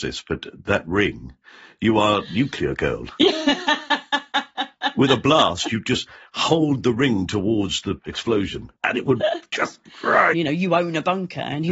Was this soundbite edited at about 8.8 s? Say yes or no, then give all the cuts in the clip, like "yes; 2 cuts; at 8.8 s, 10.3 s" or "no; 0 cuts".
yes; 2 cuts; at 8.8 s, 10.3 s